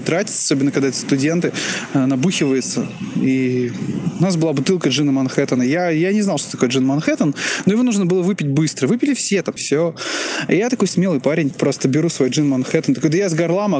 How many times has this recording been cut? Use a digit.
2